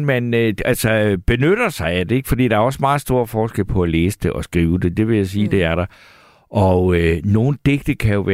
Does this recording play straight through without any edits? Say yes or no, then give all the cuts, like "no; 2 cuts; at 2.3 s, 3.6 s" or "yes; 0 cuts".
yes; 0 cuts